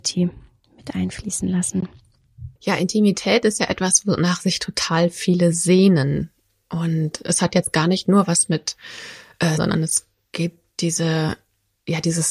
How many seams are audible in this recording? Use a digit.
2